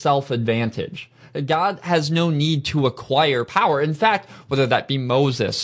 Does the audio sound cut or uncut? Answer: cut